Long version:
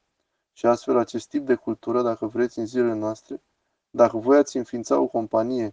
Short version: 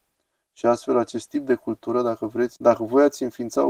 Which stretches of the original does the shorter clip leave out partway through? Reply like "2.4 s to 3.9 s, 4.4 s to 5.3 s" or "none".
2.6 s to 3.9 s